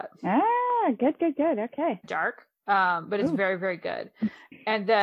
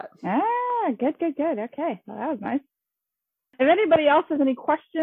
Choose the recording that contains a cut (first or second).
first